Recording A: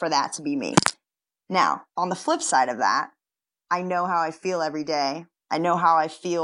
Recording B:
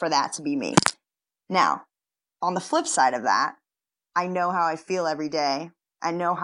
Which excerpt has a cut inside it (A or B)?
A